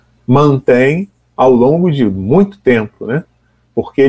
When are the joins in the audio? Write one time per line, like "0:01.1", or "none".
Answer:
none